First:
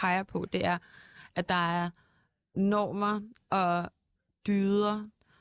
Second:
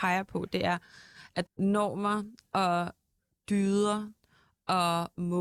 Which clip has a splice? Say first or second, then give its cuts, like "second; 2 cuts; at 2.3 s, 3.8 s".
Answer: second; 1 cut; at 1.5 s